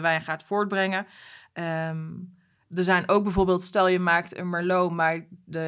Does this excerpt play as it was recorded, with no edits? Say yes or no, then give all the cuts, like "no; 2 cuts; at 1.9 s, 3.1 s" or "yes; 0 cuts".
yes; 0 cuts